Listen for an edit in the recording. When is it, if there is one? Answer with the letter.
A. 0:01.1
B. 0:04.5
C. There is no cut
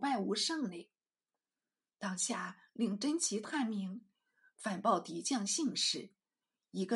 C